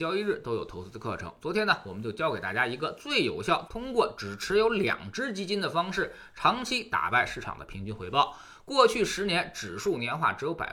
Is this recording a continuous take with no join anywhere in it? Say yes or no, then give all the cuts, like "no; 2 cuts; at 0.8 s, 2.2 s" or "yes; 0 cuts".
no; 1 cut; at 3.7 s